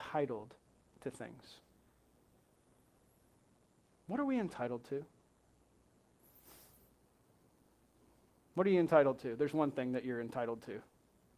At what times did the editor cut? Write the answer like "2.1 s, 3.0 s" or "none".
none